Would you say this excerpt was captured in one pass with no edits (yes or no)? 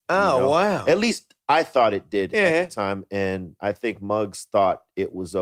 yes